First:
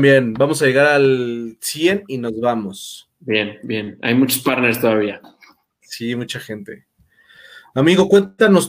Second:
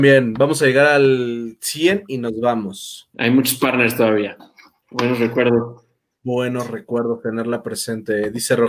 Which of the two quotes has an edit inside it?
second; 2 cuts; at 3.1 s, 4.8 s

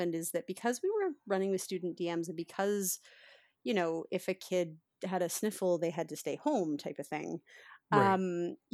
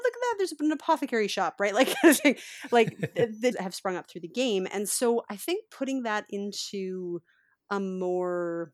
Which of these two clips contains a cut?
second; 1 cut; at 3.5 s

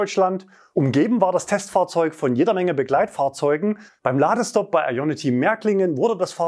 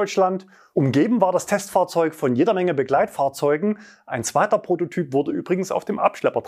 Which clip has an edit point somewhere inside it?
first; 1 cut; at 3.9 s

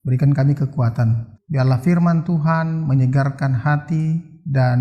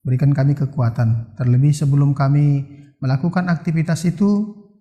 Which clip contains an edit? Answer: first; 1 cut; at 1.3 s

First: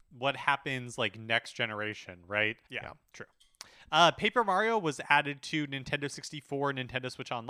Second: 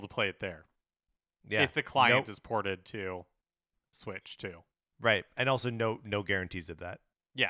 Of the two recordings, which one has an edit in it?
first; 1 cut; at 2.7 s

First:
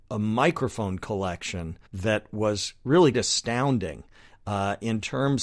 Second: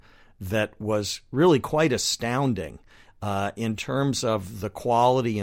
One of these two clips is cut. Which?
first; 2 cuts; at 1.9 s, 3.1 s

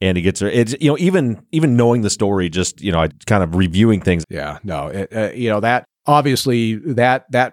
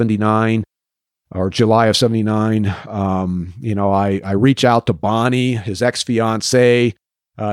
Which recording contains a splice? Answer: first; 3 cuts; at 3.1 s, 4.2 s, 6.0 s

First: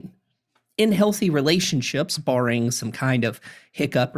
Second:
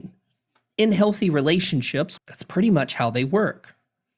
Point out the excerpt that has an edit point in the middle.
second; 1 cut; at 2.2 s

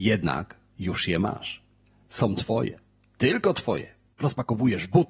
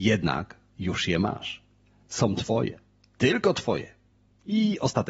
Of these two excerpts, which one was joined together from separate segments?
first; 1 cut; at 4.1 s

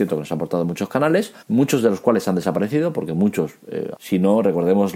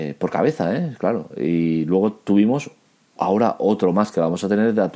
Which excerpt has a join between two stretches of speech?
first; 2 cuts; at 1.4 s, 3.9 s

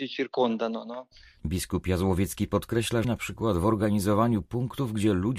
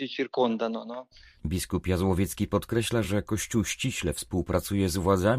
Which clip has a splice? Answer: first; 1 cut; at 3.0 s

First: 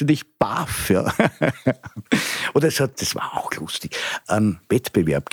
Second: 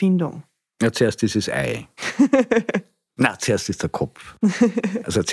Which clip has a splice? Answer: first; 1 cut; at 4.2 s

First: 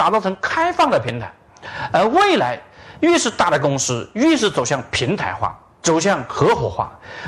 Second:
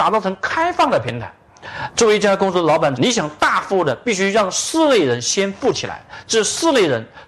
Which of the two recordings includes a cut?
second; 2 cuts; at 1.9 s, 3.0 s

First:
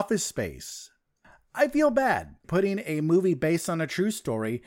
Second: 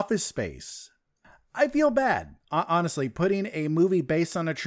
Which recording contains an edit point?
first; 1 cut; at 2.4 s

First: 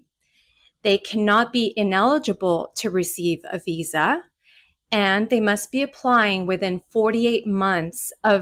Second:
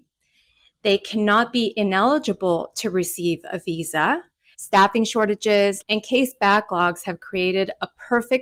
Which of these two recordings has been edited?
second; 2 cuts; at 4.5 s, 5.8 s

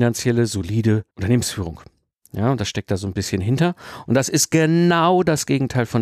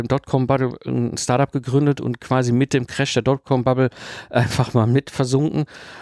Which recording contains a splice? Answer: first; 1 cut; at 1.1 s

